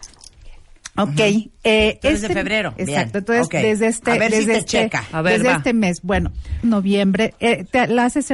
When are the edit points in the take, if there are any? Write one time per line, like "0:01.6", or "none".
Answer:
0:02.8
0:06.6